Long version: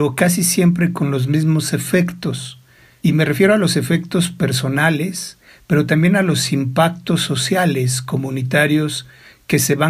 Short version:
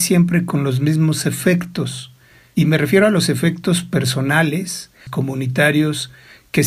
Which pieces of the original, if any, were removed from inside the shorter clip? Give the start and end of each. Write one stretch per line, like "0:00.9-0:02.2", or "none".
0:05.5-0:08.0